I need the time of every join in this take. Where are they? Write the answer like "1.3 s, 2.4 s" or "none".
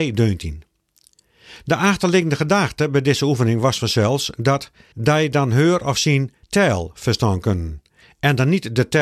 4.9 s, 6.4 s